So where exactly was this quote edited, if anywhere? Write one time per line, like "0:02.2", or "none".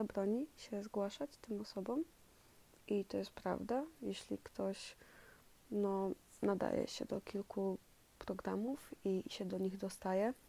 none